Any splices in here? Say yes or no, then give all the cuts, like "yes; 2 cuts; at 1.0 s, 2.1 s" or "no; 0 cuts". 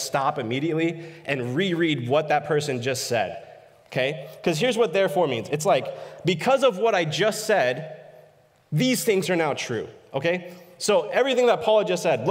no; 0 cuts